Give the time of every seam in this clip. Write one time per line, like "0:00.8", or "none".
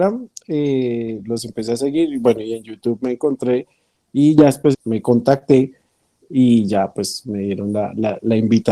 0:04.7